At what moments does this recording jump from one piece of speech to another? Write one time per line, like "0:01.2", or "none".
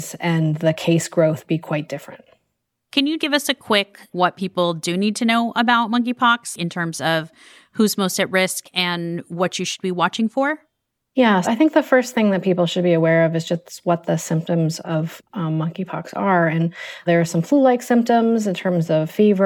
0:03.2
0:11.4